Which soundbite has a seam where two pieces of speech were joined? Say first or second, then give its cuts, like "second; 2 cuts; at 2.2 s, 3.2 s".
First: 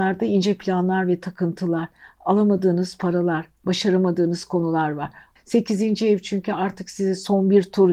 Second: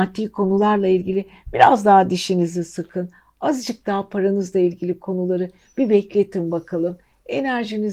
first; 1 cut; at 5.4 s